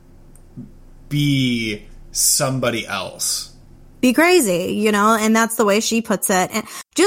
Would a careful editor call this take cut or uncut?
uncut